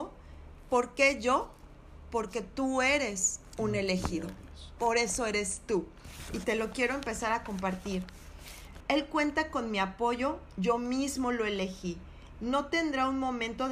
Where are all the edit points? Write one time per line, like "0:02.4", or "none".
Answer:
0:08.8
0:12.3